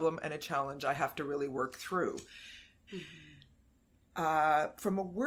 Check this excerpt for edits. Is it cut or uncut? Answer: cut